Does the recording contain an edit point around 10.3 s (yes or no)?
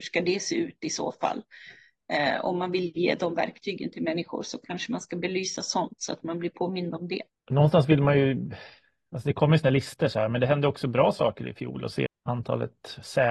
no